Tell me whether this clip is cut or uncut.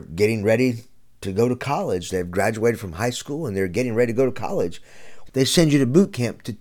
cut